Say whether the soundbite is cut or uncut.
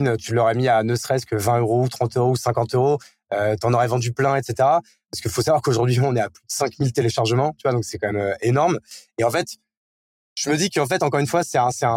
uncut